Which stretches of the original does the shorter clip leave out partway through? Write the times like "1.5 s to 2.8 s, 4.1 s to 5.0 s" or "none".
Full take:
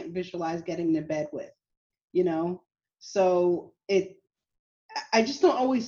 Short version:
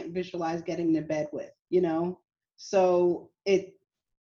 1.6 s to 2.0 s